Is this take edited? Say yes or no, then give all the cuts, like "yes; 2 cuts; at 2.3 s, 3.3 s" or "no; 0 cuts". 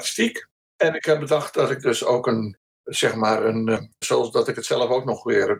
yes; 1 cut; at 4.0 s